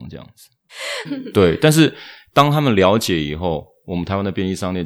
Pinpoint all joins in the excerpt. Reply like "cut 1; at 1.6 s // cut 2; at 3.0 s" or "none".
cut 1; at 1.1 s